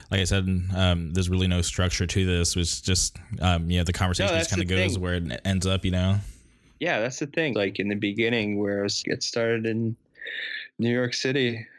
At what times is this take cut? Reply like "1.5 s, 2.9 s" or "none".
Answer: 7.5 s, 9.0 s